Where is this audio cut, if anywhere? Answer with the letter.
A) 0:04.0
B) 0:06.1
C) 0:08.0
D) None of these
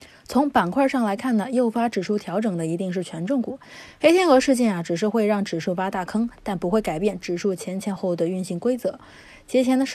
C